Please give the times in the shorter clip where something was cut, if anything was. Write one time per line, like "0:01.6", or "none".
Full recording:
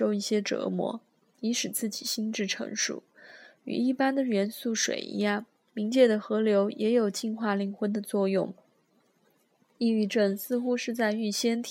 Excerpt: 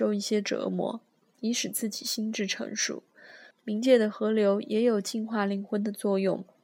0:03.5